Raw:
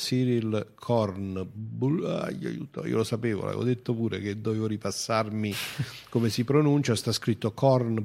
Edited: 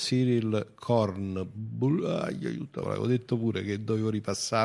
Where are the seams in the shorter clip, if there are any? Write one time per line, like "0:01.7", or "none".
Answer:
0:02.8